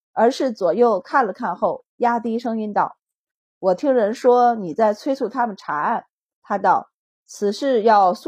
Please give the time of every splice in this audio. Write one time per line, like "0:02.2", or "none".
0:06.3